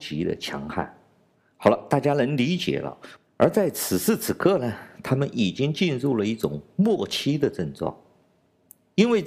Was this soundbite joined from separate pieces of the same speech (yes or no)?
yes